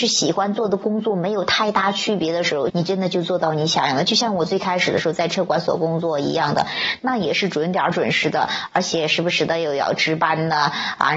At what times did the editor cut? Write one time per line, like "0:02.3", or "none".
0:02.7